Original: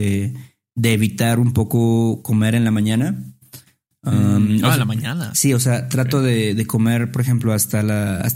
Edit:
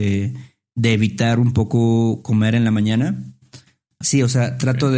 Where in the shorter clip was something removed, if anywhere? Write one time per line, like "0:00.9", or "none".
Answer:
0:04.0